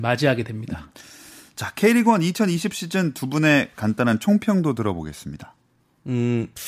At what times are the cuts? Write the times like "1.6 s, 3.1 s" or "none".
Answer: none